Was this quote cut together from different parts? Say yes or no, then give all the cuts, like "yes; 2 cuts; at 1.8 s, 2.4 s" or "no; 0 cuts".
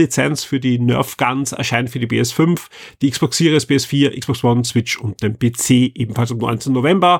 no; 0 cuts